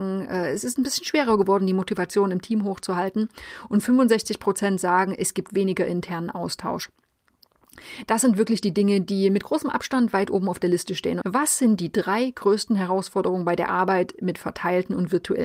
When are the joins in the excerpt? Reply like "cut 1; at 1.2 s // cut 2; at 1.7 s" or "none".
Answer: cut 1; at 11.2 s